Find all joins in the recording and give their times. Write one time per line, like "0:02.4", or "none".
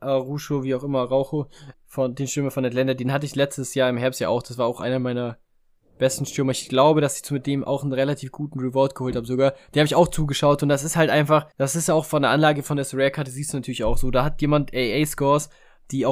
0:01.7
0:11.5